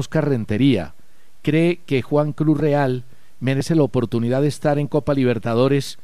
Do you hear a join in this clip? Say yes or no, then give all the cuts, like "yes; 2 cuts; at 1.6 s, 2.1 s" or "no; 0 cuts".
no; 0 cuts